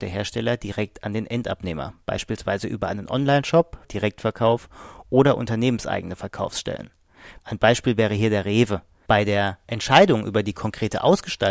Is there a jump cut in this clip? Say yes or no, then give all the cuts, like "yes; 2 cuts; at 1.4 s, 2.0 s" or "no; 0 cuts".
yes; 3 cuts; at 3.8 s, 7.4 s, 9.1 s